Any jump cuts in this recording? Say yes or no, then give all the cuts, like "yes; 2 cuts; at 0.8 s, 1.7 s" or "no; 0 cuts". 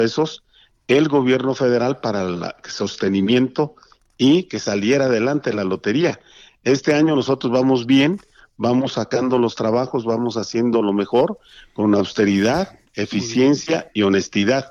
no; 0 cuts